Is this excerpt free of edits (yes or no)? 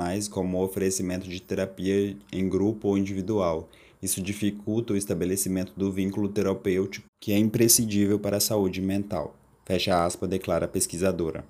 no